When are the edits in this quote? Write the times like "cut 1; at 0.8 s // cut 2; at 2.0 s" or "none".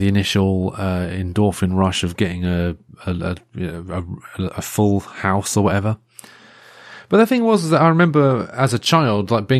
none